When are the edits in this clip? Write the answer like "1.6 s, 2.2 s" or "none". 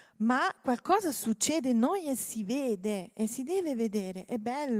none